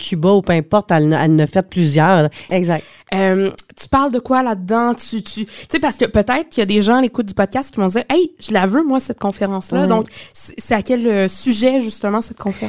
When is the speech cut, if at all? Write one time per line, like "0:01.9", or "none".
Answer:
0:02.5